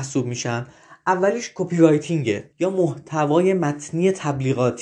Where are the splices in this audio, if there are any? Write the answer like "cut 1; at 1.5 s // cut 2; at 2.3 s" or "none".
cut 1; at 2.5 s

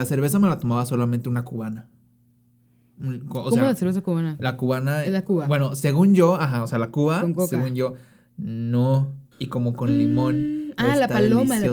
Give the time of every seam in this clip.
cut 1; at 9.3 s

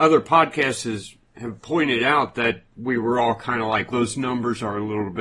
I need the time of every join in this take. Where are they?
cut 1; at 3.9 s

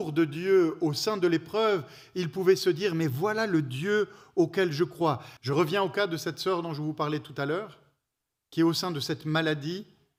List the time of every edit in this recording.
cut 1; at 5.4 s

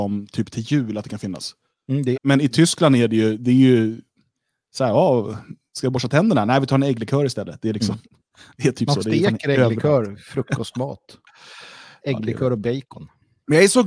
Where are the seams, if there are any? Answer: cut 1; at 2.2 s

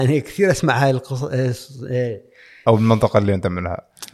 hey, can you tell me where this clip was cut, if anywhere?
cut 1; at 2.6 s

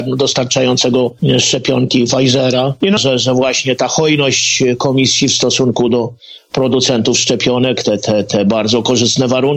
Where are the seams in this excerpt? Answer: cut 1; at 3.0 s

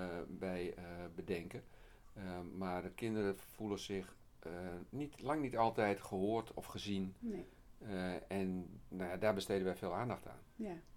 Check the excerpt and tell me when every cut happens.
none

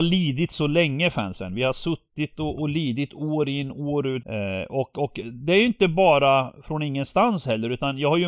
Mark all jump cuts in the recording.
cut 1; at 4.2 s

